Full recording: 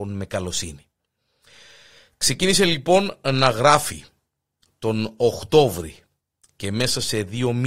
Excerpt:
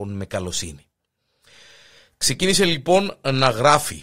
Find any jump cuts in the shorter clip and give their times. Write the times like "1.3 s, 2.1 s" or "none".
none

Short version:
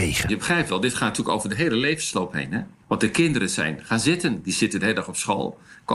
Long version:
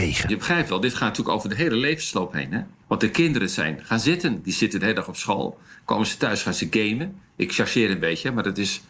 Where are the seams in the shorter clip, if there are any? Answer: none

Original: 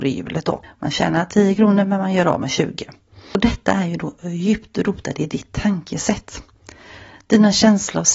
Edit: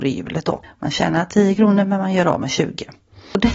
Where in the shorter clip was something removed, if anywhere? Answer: none

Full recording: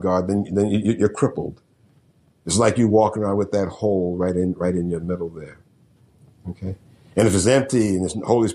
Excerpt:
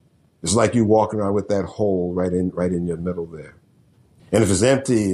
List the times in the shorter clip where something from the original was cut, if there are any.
4.2 s

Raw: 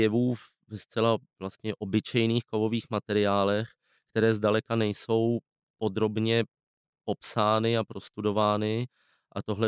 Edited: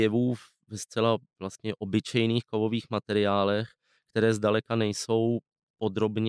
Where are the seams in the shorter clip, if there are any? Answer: none

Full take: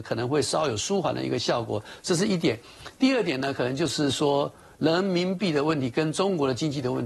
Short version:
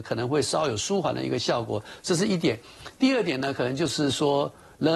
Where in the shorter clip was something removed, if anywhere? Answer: none

